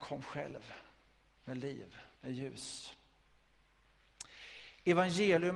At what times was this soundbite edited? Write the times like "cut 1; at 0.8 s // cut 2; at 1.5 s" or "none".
cut 1; at 2.2 s